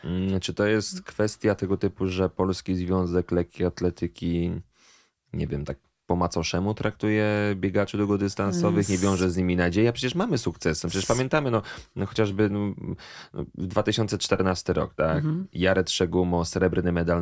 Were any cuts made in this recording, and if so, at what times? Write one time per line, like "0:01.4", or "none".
none